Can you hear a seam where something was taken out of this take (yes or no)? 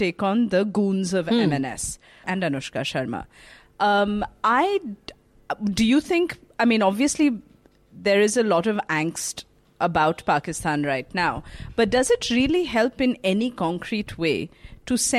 yes